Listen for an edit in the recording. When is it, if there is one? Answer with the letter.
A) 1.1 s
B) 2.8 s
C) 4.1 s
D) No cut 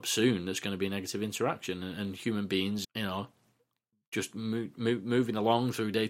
B